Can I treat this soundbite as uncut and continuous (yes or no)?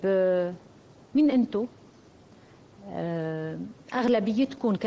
no